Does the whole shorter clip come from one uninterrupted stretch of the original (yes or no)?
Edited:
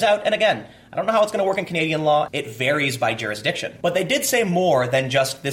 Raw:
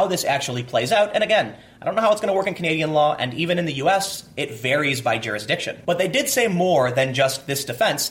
no